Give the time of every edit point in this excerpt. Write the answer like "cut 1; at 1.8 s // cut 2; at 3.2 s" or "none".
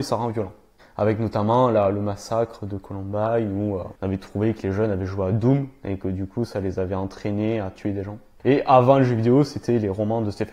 cut 1; at 4.0 s